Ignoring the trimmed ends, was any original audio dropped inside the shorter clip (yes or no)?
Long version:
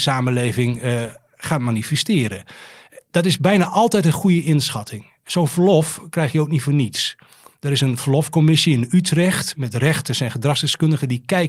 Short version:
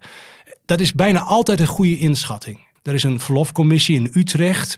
yes